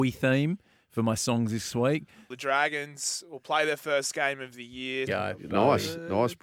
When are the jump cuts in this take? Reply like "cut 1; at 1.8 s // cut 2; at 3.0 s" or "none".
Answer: cut 1; at 2.3 s // cut 2; at 5.1 s